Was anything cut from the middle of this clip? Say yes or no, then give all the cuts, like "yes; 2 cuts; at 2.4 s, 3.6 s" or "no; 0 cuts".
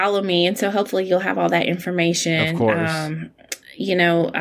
no; 0 cuts